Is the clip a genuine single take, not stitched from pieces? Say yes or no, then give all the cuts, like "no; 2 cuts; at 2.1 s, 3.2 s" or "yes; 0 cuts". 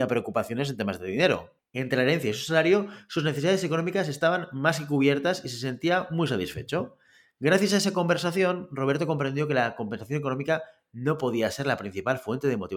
yes; 0 cuts